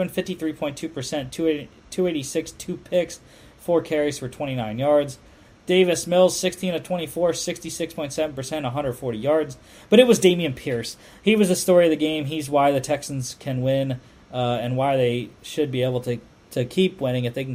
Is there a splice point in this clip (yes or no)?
no